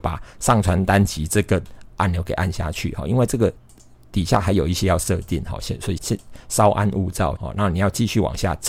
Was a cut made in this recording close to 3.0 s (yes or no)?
no